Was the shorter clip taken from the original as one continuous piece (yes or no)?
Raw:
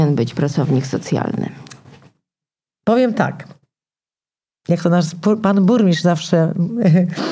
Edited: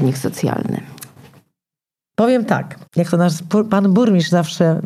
no